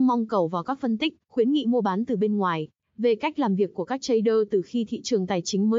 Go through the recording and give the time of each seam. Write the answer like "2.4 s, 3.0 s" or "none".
2.8 s